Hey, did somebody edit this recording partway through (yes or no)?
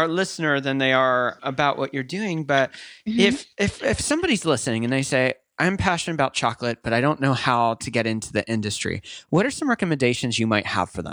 yes